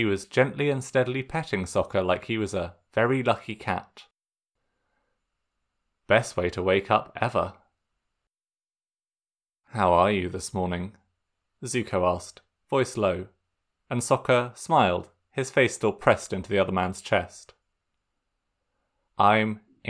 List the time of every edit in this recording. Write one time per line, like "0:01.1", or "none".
none